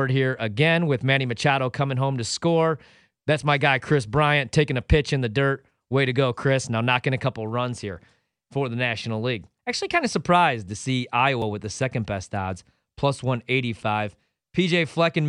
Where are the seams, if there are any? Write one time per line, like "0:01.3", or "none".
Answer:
0:09.6